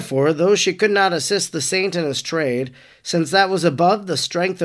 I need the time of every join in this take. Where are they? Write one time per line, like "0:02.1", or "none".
none